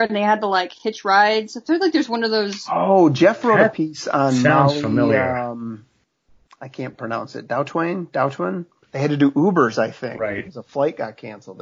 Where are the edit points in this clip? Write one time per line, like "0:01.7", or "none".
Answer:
0:08.8